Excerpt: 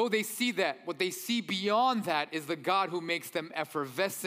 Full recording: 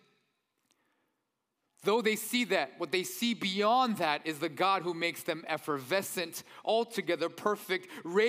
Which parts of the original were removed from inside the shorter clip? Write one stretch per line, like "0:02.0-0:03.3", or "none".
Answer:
none

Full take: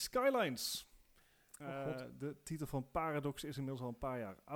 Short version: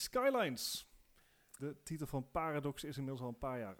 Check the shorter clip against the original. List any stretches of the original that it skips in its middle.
0:01.6-0:02.2

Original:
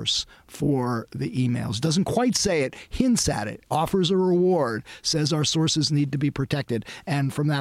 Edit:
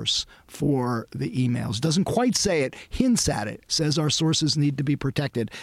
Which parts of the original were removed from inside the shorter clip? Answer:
0:03.7-0:05.0

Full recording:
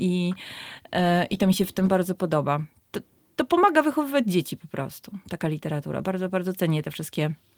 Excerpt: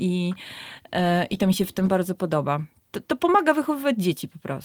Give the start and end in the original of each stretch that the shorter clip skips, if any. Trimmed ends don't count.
0:03.0-0:03.3

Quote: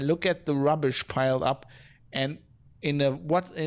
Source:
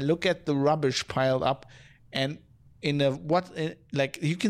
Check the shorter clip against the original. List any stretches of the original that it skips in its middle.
none

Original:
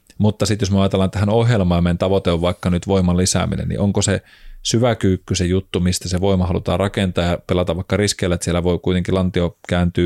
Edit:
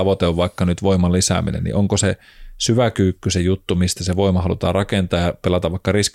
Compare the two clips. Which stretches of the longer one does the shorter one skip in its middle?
none

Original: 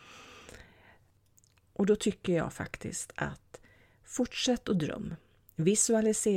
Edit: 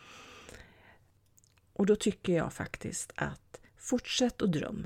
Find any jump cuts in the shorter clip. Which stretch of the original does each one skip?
0:03.7-0:04.0

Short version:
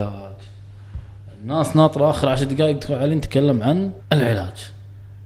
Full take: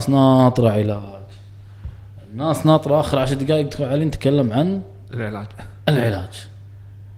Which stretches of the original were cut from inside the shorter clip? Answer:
0:04.9-0:05.8

